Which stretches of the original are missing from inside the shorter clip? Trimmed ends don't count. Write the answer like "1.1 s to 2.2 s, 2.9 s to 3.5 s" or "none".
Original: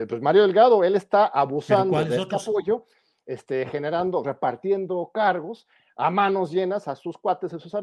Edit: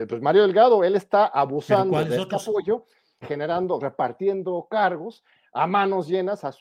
3.2 s to 3.6 s